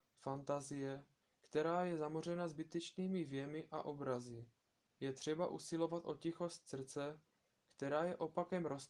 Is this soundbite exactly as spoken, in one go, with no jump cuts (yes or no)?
no